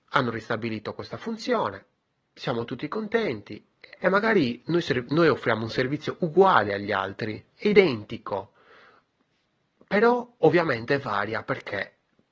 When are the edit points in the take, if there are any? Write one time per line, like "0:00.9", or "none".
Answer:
0:04.0
0:07.5
0:10.3